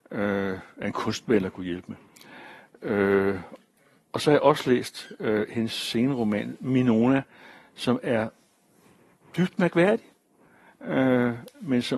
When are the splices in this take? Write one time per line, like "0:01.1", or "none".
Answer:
none

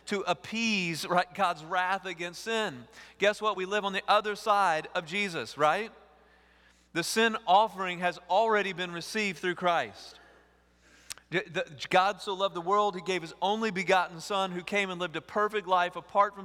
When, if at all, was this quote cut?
none

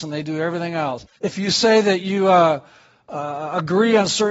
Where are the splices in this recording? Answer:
0:01.2

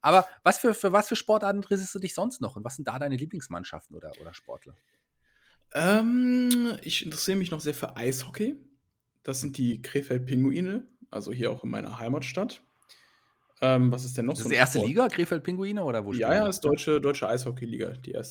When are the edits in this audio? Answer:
none

